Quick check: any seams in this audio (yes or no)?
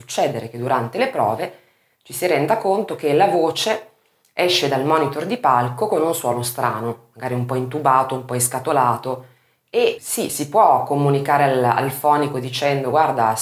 yes